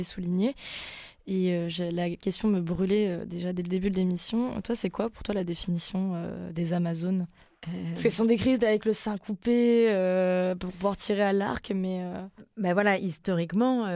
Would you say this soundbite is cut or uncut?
uncut